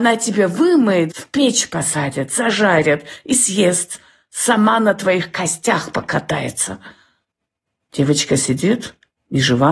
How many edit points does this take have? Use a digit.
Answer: 1